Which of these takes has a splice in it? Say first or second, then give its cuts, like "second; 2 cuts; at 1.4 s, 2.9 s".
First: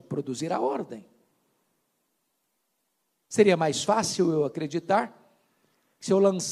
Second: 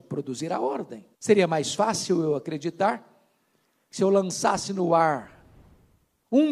second; 1 cut; at 1.1 s